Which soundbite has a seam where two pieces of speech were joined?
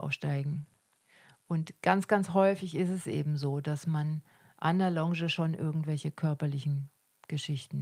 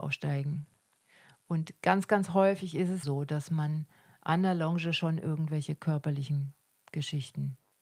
second; 1 cut; at 3.0 s

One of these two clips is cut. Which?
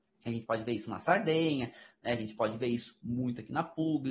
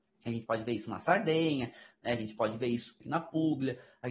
second; 1 cut; at 3.0 s

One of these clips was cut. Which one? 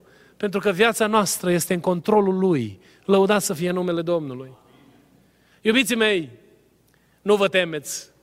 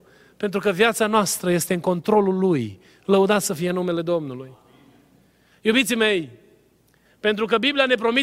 second; 1 cut; at 7.1 s

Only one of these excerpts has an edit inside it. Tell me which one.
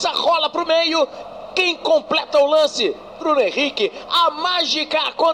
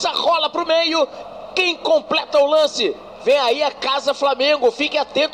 second; 1 cut; at 3.2 s

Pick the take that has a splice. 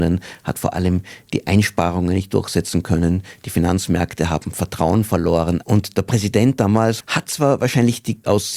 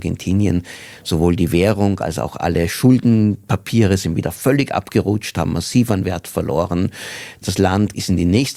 first; 2 cuts; at 5.6 s, 7.0 s

